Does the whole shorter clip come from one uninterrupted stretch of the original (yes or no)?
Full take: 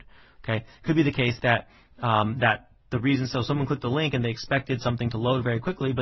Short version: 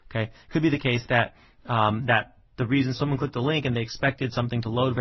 no